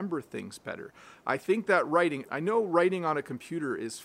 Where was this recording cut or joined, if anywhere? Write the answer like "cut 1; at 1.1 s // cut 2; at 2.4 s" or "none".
cut 1; at 2.2 s